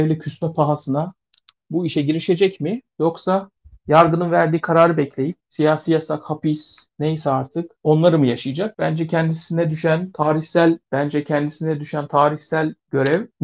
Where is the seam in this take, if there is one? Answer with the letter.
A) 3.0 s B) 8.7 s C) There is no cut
B